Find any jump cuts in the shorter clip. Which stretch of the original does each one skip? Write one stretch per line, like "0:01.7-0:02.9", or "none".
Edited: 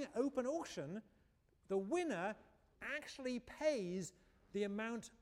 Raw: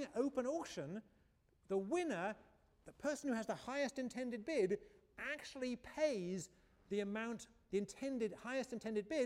0:02.8-0:05.1